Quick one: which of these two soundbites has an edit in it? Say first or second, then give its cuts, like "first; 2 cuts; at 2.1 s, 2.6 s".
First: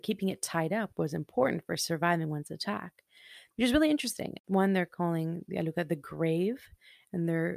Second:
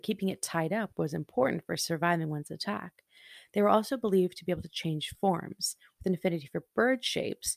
first; 1 cut; at 3.5 s